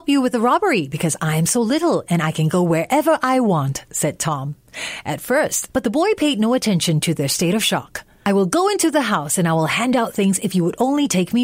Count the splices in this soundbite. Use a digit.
1